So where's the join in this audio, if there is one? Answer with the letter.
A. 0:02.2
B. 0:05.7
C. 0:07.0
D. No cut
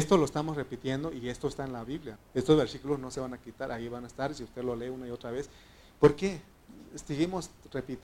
A